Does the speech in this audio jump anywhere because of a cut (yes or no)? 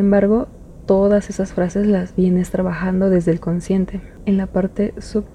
no